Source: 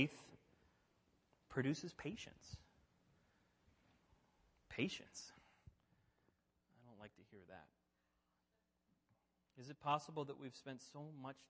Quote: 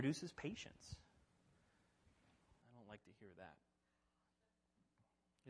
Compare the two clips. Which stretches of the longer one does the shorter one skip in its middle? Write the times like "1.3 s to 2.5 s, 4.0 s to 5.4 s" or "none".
4.2 s to 6.7 s